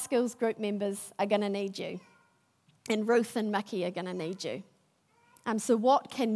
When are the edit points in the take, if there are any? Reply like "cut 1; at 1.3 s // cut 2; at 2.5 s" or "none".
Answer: none

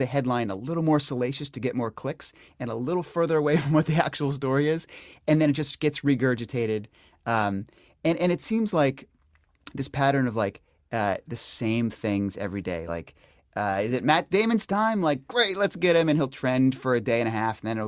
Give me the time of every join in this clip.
cut 1; at 12.9 s

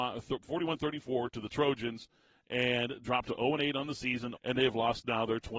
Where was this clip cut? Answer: cut 1; at 4.3 s

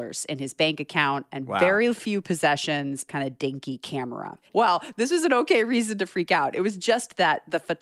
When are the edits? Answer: cut 1; at 3.1 s // cut 2; at 4.5 s

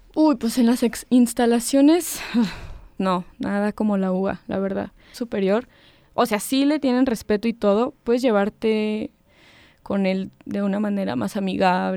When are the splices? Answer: cut 1; at 3.0 s // cut 2; at 5.1 s // cut 3; at 8.0 s

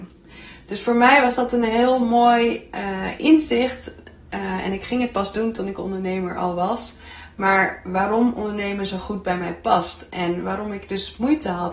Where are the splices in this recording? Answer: none

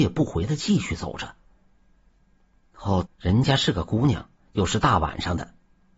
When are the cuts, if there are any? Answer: cut 1; at 3.0 s // cut 2; at 4.4 s

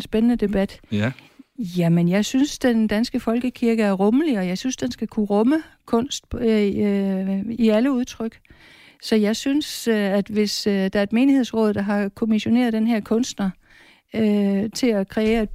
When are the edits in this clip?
none

